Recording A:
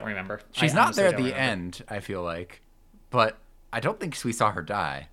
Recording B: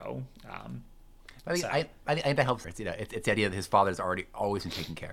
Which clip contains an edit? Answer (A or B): B